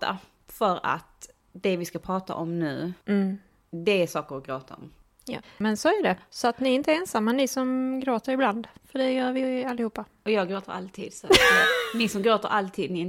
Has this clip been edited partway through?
yes; 1 cut; at 5.4 s

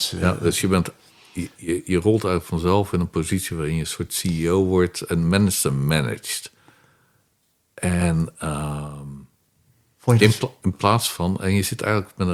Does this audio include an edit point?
no; 0 cuts

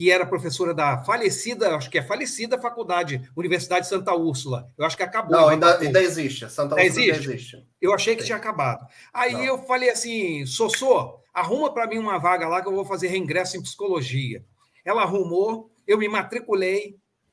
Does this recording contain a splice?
no; 0 cuts

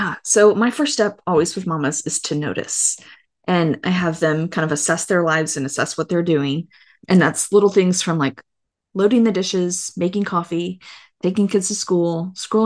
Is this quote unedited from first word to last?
yes; 0 cuts

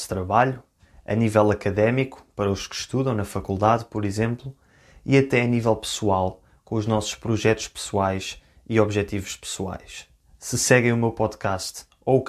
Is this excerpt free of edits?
yes; 0 cuts

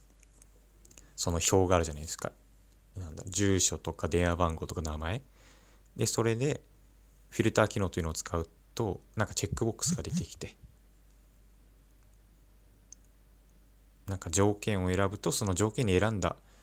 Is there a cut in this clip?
no; 0 cuts

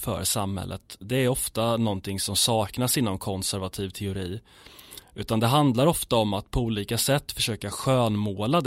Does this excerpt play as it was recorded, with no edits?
yes; 0 cuts

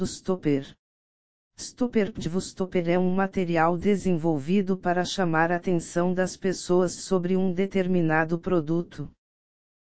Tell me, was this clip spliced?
no; 0 cuts

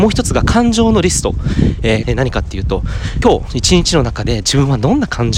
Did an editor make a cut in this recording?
yes; 2 cuts; at 2.0 s, 3.2 s

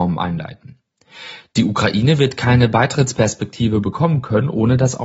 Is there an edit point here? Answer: no; 0 cuts

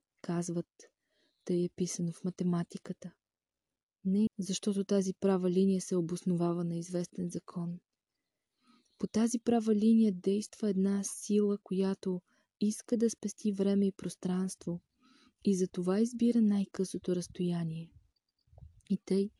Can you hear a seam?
yes; 1 cut; at 4.3 s

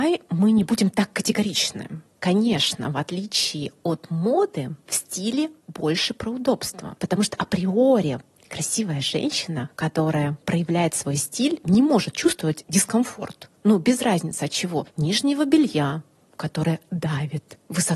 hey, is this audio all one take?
yes; 0 cuts

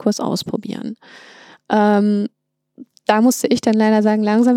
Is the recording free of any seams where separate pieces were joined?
yes; 0 cuts

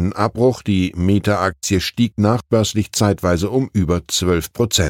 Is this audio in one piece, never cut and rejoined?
yes; 0 cuts

